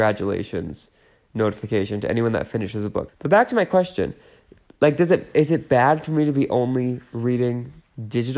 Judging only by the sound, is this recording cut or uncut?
cut